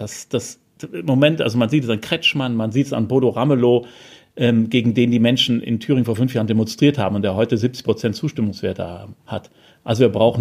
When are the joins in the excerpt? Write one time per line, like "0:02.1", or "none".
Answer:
none